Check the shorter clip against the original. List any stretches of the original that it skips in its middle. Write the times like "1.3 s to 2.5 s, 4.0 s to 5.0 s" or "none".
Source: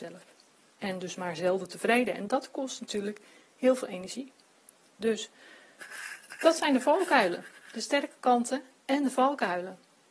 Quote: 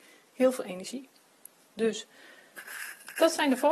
none